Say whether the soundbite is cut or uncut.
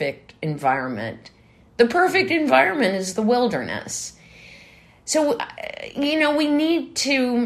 uncut